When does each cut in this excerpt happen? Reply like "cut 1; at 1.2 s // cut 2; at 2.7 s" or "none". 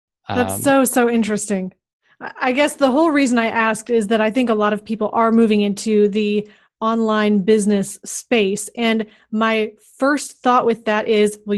none